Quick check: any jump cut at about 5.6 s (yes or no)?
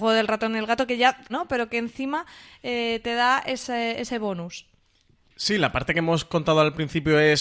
no